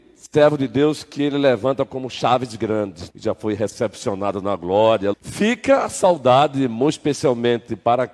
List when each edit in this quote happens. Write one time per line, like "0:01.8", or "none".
0:03.1
0:05.1

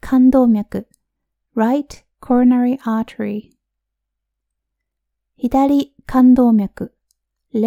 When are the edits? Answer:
none

